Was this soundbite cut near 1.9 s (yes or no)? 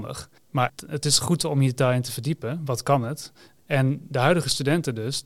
no